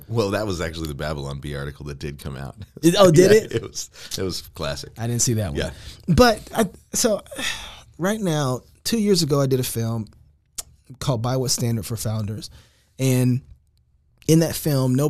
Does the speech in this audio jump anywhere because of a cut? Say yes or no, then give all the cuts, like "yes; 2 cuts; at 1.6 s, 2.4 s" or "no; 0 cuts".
no; 0 cuts